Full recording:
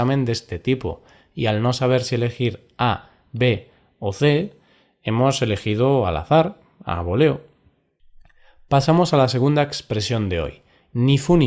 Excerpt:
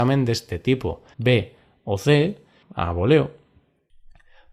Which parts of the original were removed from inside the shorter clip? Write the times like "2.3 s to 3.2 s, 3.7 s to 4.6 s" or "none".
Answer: 1.1 s to 3.3 s, 4.8 s to 6.7 s